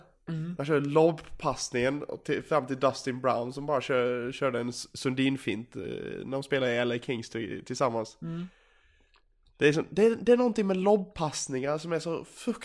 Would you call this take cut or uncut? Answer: uncut